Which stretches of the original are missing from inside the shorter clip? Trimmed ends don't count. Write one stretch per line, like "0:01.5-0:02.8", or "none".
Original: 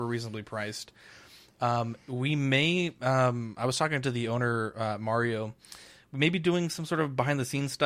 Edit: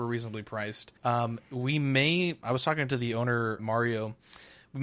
0:01.0-0:01.5
0:03.0-0:03.5
0:04.7-0:05.0